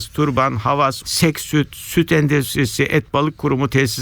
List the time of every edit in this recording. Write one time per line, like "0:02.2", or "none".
0:01.0